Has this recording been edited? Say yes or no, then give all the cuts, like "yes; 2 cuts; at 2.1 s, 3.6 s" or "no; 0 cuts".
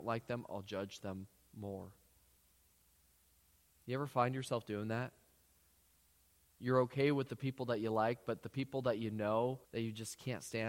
yes; 1 cut; at 9.6 s